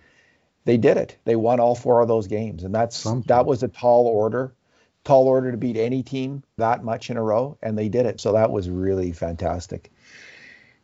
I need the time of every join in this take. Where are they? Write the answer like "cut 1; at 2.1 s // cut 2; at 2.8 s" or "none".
cut 1; at 6.6 s // cut 2; at 8.2 s